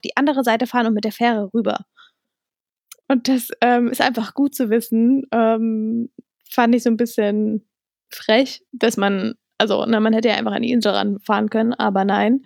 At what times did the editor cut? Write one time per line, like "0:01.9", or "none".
0:08.7